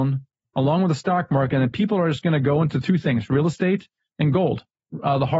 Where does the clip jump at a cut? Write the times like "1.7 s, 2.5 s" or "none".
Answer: none